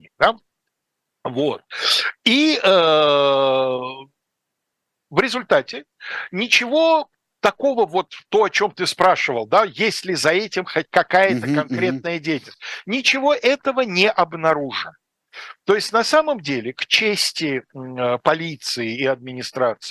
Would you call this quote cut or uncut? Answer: uncut